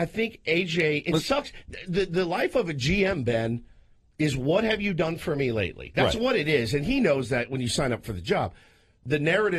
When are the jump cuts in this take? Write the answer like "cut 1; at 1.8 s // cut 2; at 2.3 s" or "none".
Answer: none